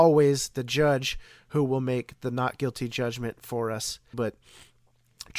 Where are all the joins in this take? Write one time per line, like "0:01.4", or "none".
0:04.1